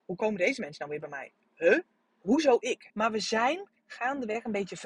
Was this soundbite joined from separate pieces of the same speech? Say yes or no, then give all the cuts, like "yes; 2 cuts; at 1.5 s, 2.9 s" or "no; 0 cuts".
yes; 1 cut; at 2.9 s